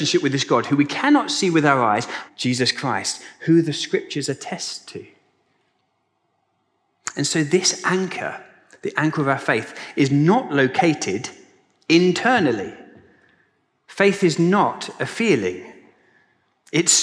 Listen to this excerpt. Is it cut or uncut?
cut